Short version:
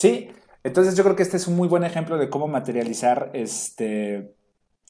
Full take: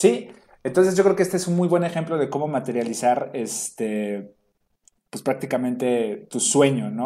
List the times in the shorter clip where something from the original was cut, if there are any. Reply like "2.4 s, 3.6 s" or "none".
none